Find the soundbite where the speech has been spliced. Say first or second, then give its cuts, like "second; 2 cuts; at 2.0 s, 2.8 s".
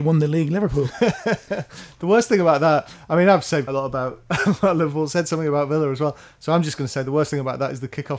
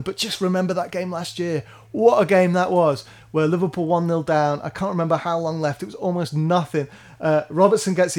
first; 1 cut; at 3.7 s